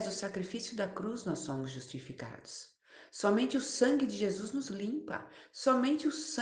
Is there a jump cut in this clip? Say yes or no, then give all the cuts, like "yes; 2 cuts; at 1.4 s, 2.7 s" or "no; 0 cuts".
no; 0 cuts